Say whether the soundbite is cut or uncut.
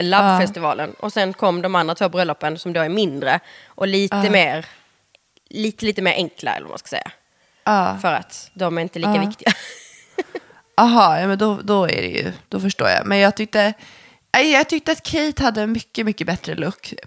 uncut